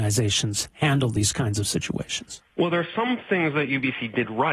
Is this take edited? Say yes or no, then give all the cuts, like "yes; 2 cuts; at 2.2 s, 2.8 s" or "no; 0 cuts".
yes; 1 cut; at 2.5 s